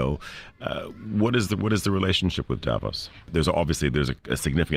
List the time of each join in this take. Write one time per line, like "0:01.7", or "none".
0:03.3

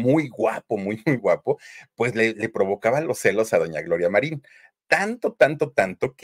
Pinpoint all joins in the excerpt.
0:01.2

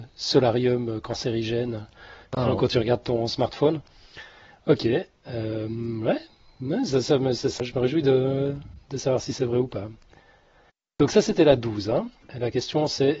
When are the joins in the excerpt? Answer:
0:07.6
0:12.2

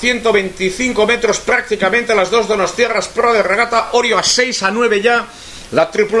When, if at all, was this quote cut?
none

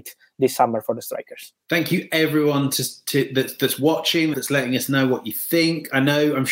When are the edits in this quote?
0:01.6
0:04.3

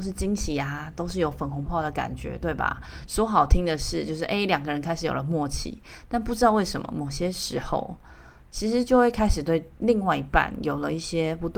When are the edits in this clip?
0:01.7
0:03.1

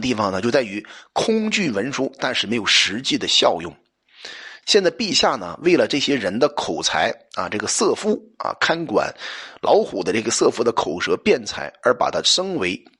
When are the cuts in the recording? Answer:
0:04.6

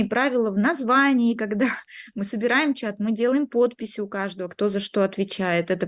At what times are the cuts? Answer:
none

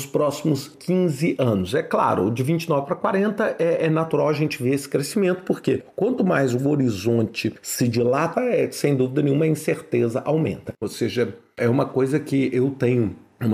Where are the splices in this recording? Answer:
0:08.3
0:10.8

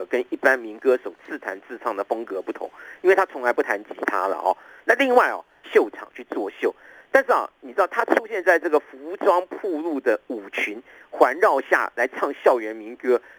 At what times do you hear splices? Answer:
0:05.6

